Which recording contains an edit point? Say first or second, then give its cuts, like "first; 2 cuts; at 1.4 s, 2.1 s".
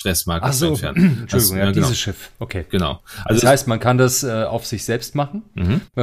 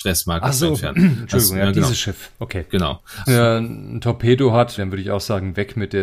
second; 2 cuts; at 3.2 s, 4.8 s